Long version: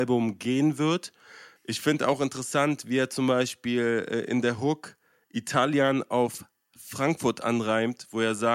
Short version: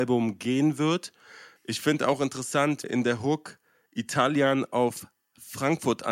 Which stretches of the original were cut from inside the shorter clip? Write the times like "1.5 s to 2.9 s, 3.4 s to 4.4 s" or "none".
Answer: 2.8 s to 4.2 s